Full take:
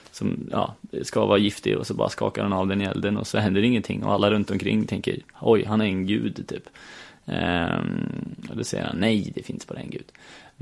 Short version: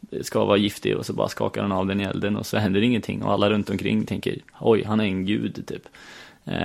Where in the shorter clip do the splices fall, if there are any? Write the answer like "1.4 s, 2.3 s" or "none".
none